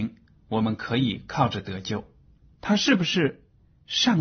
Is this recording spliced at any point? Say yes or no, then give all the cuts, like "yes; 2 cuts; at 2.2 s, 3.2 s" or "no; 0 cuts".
yes; 1 cut; at 2.6 s